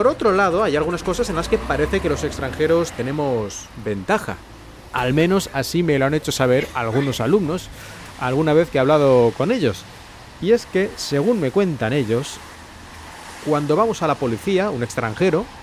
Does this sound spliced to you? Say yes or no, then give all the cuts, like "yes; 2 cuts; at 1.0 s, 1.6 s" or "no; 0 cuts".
no; 0 cuts